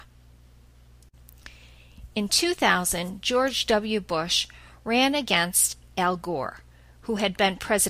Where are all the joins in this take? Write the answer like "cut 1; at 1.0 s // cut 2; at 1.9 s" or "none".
none